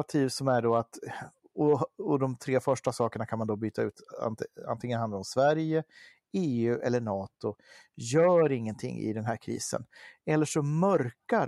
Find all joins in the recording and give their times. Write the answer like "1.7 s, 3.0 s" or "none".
none